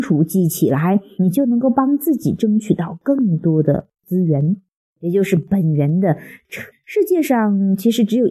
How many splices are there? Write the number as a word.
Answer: two